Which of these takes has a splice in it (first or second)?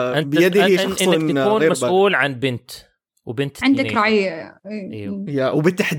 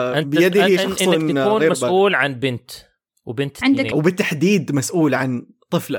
second